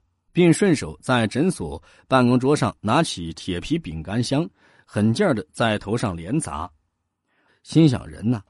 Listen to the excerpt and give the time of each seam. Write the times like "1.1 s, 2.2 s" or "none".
7.5 s

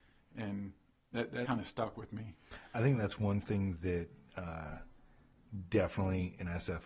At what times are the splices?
1.4 s

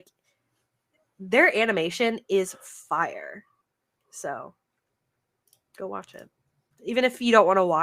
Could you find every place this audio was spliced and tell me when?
none

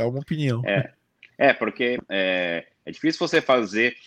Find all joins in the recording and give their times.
2.0 s

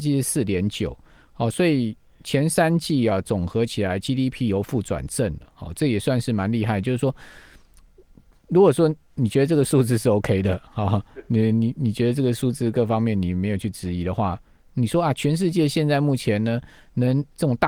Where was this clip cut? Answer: none

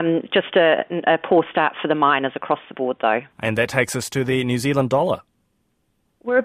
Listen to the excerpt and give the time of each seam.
3.3 s

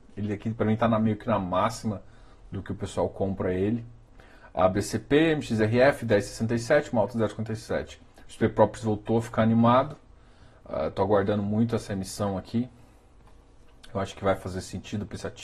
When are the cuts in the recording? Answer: none

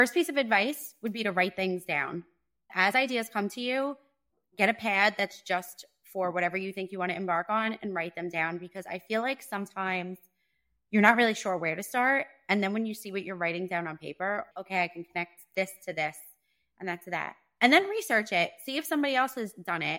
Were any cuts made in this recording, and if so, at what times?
14.5 s

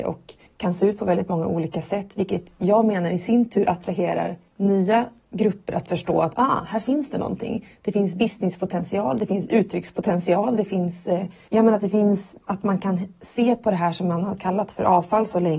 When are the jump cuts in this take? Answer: none

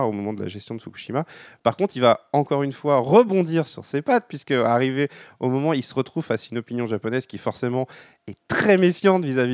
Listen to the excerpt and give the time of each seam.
none

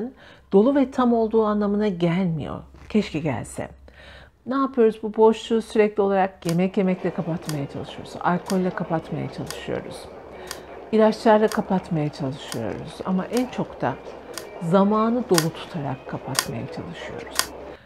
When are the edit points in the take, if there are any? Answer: 4.3 s, 13.0 s

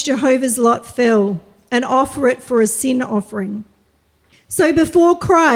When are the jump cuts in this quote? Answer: 4.3 s

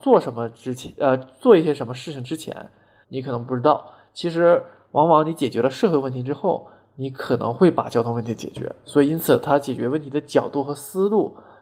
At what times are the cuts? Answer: 3.0 s

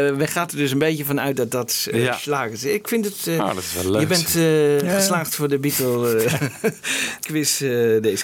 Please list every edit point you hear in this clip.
none

